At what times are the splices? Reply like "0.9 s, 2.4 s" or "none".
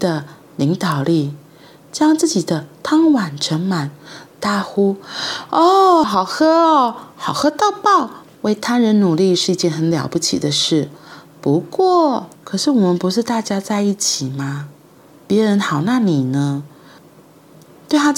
6.0 s, 8.2 s, 12.4 s